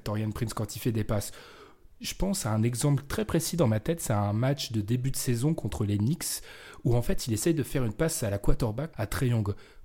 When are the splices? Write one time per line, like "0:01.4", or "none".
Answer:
0:08.9